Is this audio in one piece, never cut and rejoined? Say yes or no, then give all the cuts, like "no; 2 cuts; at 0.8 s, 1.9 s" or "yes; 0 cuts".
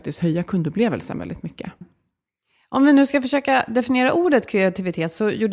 no; 1 cut; at 1.8 s